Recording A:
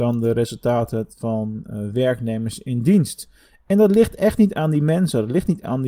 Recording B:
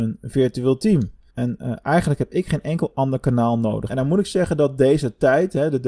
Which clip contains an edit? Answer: B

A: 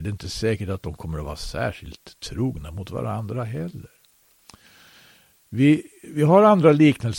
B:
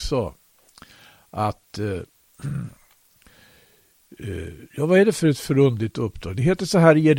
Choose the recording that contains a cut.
B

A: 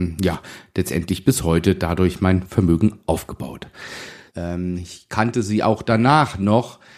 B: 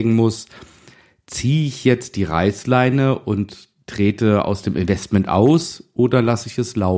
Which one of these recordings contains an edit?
A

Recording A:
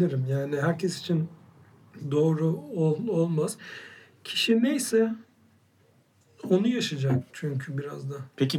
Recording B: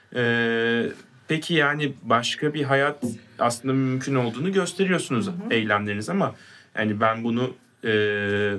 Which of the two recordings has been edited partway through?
A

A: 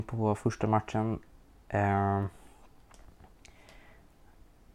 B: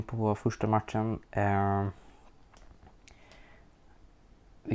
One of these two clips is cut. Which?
B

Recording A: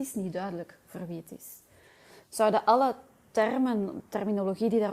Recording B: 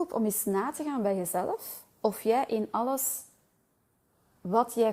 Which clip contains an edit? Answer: A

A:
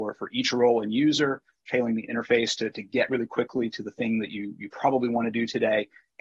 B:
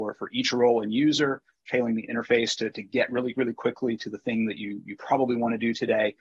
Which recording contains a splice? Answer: A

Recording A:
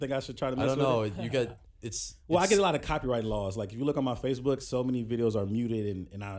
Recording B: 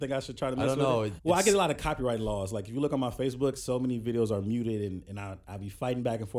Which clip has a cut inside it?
B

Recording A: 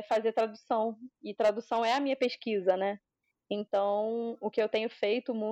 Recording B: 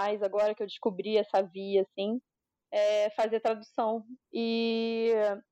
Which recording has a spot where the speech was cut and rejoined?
B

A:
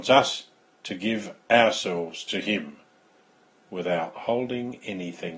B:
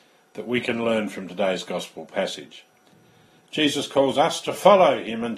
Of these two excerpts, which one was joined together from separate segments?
B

